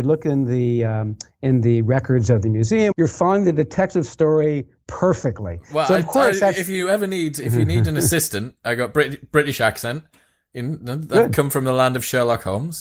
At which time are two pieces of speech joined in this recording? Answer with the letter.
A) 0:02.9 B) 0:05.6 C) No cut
A